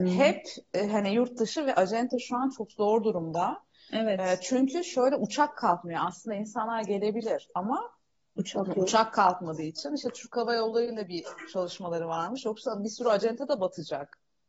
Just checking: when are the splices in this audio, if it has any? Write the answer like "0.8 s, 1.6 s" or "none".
none